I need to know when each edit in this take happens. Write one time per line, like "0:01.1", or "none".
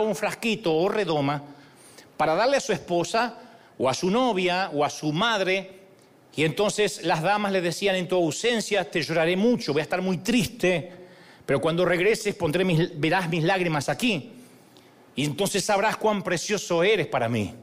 none